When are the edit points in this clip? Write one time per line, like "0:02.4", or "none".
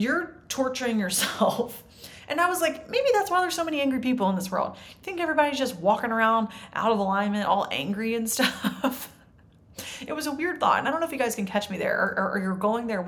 none